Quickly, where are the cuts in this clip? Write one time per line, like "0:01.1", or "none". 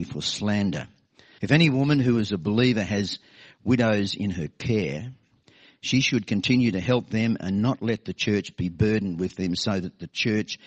0:01.4